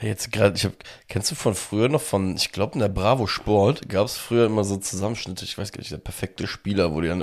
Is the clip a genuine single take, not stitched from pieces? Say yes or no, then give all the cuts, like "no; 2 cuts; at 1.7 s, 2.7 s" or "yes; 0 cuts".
yes; 0 cuts